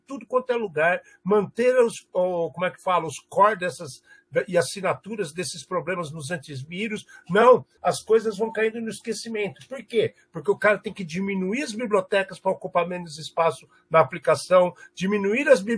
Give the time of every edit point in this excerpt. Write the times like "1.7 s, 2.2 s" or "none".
2.1 s, 7.8 s